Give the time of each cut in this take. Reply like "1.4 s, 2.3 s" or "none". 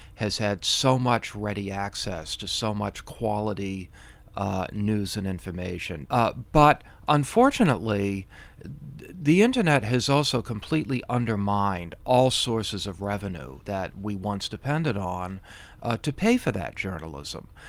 6.1 s, 13.6 s